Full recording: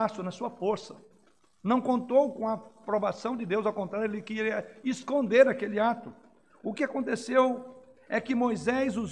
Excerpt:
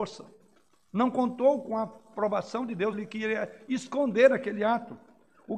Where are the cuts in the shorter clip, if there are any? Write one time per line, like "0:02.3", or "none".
0:02.9

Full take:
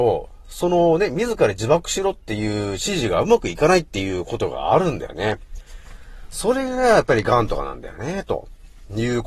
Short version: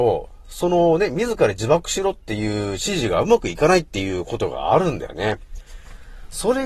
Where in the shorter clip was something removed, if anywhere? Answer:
none

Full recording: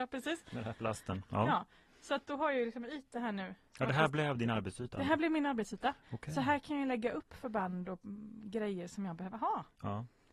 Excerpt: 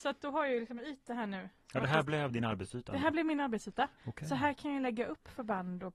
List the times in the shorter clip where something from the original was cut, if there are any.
none

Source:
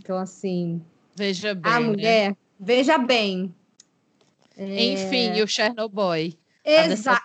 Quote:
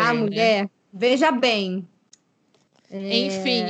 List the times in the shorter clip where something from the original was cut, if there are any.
none

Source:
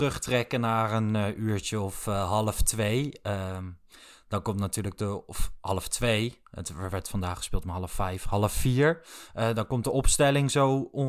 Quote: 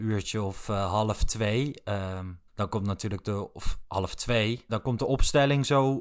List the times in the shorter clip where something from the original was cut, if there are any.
0:02.5
0:04.7

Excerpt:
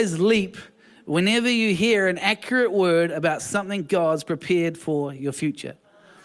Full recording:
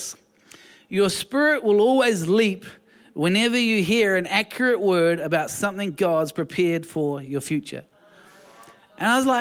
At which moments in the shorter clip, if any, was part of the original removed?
none

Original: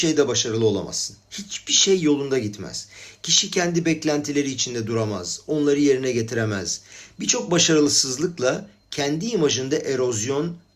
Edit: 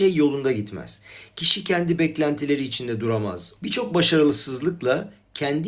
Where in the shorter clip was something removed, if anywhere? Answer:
0:03.6

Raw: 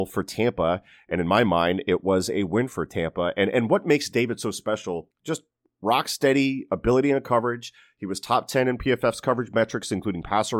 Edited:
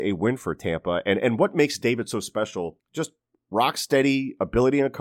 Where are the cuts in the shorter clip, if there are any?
none

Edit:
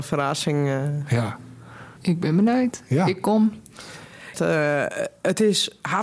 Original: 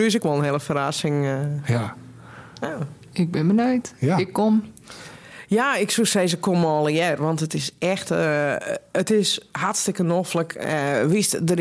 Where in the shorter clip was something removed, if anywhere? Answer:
0:02.0
0:04.3

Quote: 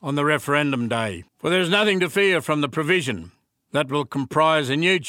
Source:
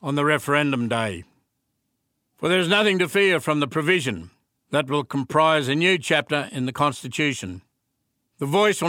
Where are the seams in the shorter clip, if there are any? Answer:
0:01.3

